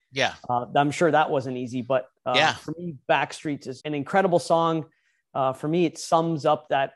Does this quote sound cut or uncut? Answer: cut